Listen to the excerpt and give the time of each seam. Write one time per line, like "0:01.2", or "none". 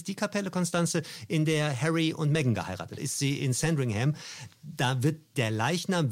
0:03.0

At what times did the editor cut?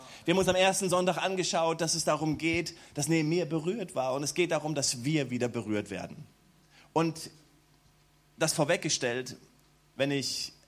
none

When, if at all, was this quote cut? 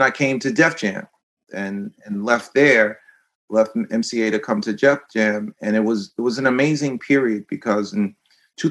none

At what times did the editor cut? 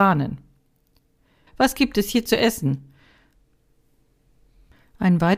0:01.5

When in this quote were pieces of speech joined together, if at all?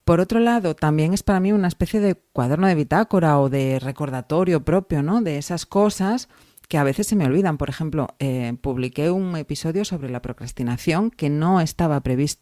none

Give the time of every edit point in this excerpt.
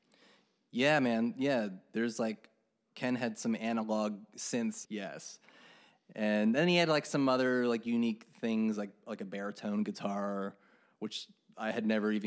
0:04.9

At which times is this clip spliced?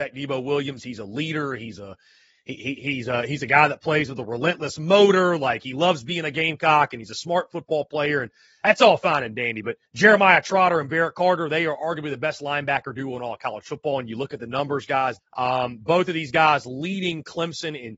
0:09.9
0:15.2

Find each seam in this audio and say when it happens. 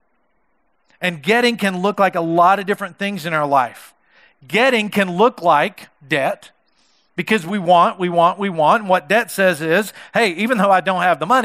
none

